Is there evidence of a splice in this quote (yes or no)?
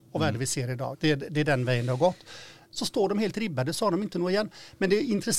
yes